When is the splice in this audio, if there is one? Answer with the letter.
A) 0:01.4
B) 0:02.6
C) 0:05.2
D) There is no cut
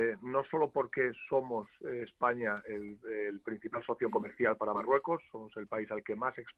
D